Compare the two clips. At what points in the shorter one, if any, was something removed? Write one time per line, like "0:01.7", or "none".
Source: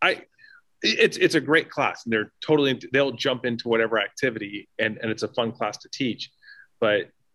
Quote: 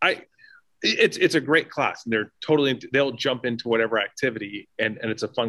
none